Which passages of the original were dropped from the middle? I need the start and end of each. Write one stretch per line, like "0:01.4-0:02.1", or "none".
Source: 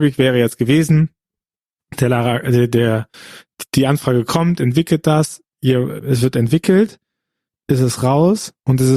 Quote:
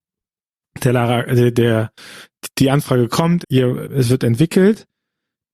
0:04.6-0:05.5